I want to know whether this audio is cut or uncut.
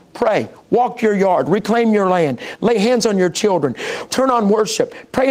cut